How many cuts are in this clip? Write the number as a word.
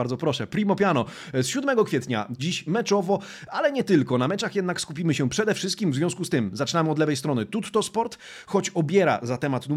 one